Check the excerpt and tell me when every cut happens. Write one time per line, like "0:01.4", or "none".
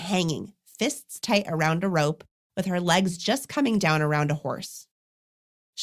none

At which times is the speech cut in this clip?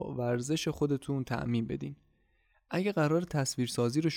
none

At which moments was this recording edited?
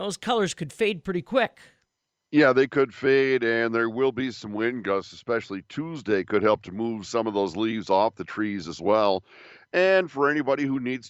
none

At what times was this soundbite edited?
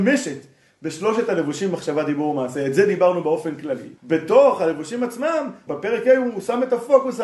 0:04.0
0:05.7

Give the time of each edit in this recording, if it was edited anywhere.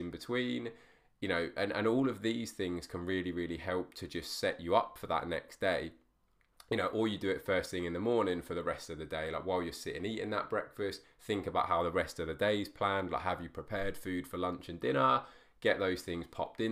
0:11.0

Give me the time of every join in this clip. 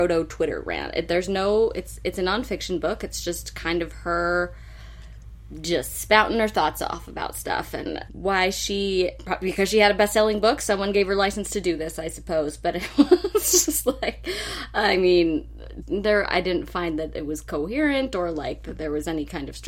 0:08.1
0:15.8

